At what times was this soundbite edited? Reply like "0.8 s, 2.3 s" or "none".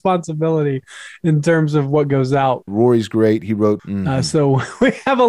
2.7 s, 3.8 s